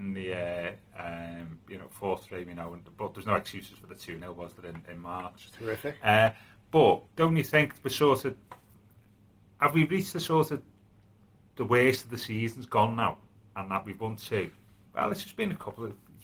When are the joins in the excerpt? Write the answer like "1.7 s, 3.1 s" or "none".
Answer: 7.1 s, 14.9 s

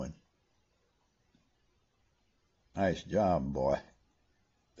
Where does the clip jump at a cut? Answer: 2.5 s

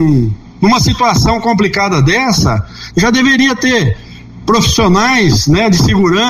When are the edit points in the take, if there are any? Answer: none

